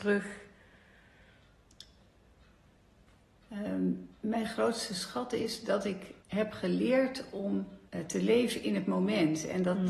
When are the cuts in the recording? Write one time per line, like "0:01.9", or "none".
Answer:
0:04.1
0:06.2
0:07.9